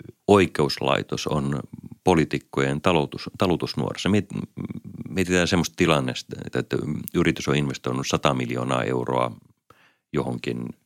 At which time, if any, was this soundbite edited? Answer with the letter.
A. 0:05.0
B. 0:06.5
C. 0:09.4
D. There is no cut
B